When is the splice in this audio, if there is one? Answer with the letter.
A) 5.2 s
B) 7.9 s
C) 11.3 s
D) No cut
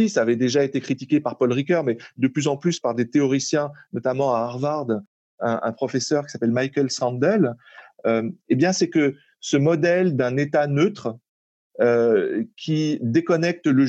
D